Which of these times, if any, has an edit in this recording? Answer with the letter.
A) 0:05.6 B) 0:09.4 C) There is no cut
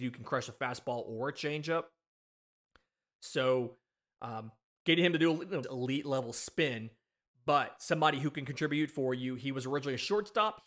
A